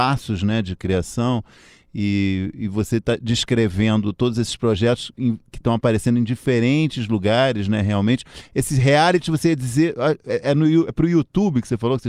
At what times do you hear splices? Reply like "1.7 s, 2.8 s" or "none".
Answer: none